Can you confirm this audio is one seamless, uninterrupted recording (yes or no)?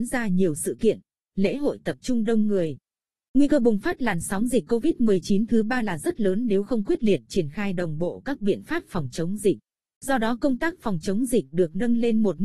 no